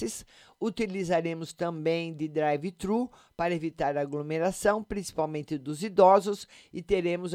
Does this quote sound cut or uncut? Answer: uncut